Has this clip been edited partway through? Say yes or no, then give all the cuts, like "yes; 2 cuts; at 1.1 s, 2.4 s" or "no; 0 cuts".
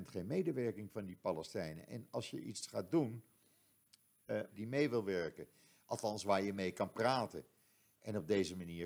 yes; 1 cut; at 4.5 s